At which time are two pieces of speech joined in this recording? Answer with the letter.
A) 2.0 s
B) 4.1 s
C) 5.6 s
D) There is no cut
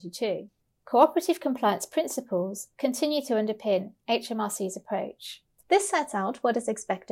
C